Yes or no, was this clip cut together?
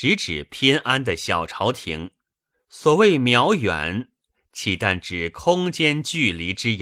yes